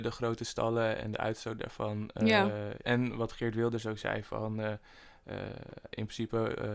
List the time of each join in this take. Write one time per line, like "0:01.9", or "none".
0:02.8